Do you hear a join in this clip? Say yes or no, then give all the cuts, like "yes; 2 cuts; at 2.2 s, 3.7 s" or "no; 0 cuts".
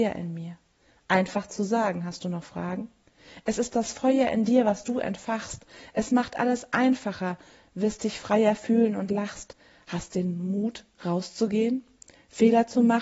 no; 0 cuts